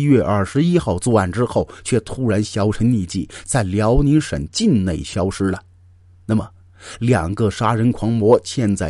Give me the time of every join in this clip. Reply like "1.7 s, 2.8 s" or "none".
none